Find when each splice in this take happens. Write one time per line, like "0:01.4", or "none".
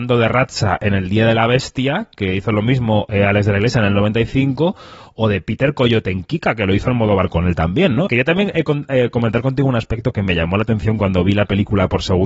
0:08.1